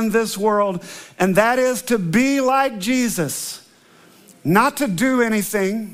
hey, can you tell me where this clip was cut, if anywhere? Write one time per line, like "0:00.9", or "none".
none

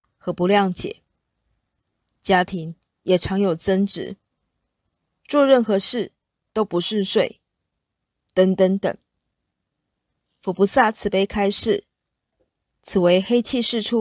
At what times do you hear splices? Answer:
0:10.2

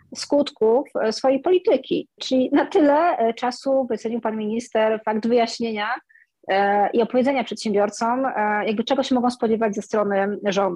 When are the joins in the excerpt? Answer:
0:02.2

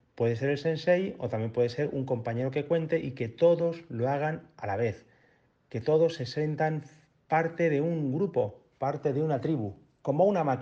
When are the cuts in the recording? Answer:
none

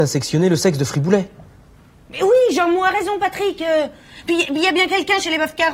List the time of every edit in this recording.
none

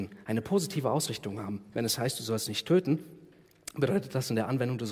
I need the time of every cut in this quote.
none

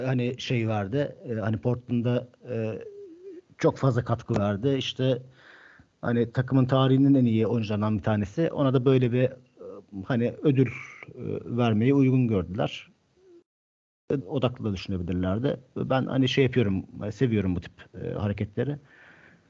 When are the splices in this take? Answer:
0:14.2

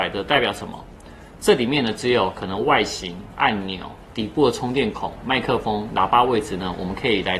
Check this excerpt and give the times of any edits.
none

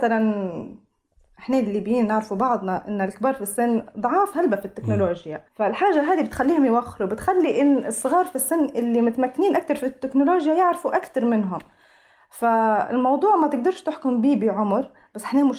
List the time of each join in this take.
0:05.5

